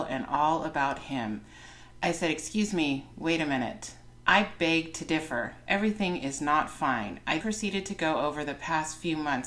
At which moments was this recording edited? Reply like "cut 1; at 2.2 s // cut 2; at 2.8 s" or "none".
cut 1; at 2.0 s // cut 2; at 7.4 s